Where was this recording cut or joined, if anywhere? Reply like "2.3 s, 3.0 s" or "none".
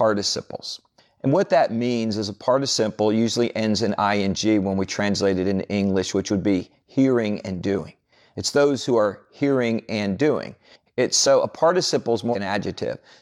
10.9 s, 12.3 s